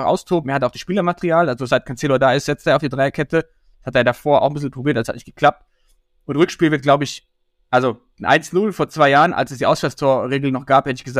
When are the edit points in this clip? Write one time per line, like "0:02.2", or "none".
none